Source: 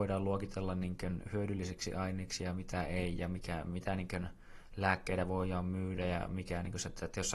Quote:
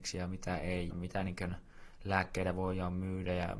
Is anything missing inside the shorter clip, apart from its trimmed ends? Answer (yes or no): yes